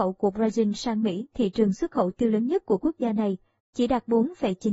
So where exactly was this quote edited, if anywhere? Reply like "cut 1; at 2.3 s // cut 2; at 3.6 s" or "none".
cut 1; at 3.6 s

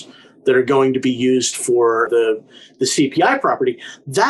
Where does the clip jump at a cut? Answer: cut 1; at 2.1 s

